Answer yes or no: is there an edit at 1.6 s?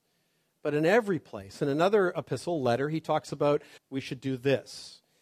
no